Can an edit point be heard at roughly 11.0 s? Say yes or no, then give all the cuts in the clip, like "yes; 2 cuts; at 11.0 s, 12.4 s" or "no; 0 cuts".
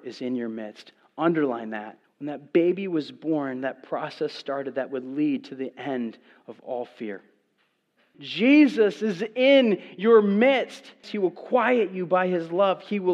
yes; 3 cuts; at 2.0 s, 8.1 s, 11.0 s